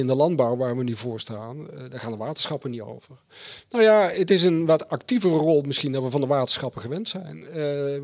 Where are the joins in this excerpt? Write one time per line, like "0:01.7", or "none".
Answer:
0:03.7